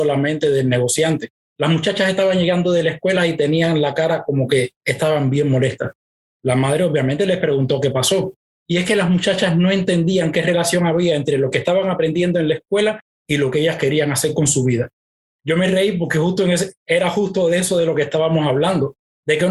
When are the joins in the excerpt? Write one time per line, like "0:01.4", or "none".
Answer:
0:01.5